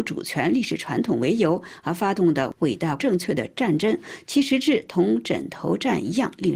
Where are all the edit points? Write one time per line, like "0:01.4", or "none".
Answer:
0:03.0